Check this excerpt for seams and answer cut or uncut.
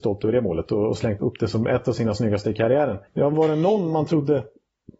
cut